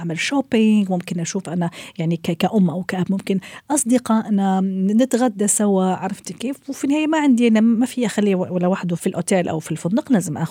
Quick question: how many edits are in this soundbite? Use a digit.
1